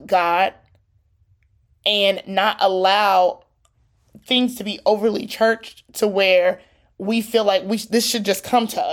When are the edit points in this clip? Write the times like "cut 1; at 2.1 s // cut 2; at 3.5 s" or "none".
none